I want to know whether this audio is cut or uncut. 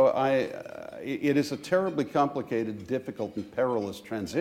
uncut